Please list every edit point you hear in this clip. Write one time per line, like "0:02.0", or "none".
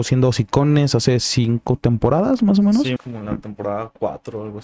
0:03.0